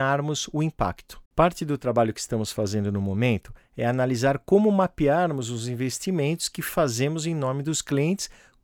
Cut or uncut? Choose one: cut